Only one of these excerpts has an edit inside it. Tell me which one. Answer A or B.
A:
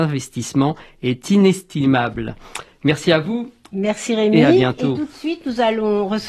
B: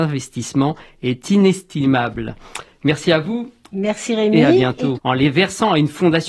B